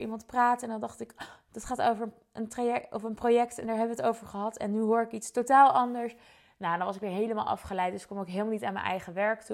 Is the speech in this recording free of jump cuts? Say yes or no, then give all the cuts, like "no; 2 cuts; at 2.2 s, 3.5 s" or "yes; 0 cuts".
yes; 0 cuts